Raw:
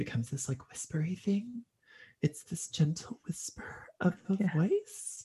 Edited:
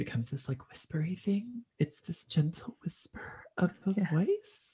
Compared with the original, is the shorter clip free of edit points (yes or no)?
no